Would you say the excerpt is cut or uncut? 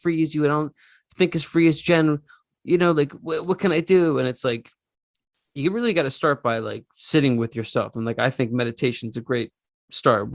uncut